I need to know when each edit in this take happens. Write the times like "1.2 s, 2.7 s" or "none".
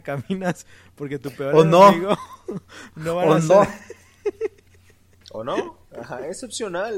none